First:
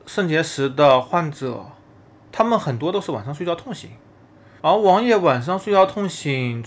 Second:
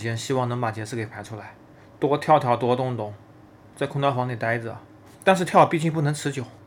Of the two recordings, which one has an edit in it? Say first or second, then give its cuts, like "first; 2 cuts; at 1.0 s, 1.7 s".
second; 1 cut; at 5.1 s